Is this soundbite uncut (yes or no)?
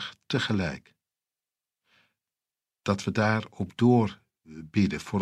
yes